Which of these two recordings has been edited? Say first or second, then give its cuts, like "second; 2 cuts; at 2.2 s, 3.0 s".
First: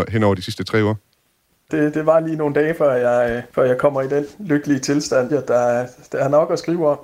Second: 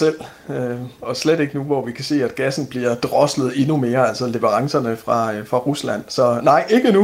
first; 3 cuts; at 1.7 s, 3.5 s, 5.3 s